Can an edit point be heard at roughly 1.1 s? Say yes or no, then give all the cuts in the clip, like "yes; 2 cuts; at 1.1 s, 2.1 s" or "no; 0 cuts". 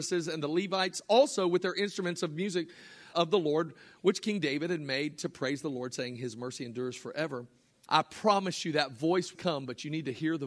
no; 3 cuts; at 3.1 s, 7.9 s, 9.4 s